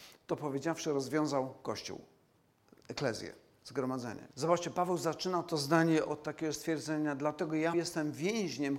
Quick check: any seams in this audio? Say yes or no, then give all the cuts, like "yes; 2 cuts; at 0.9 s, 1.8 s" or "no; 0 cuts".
yes; 2 cuts; at 4.3 s, 7.7 s